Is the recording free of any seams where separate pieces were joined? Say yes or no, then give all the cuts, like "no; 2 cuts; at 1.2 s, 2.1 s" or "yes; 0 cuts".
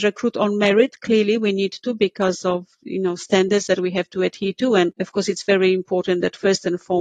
yes; 0 cuts